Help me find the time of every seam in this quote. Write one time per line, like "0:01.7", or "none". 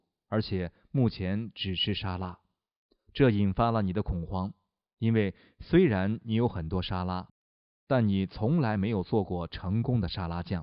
none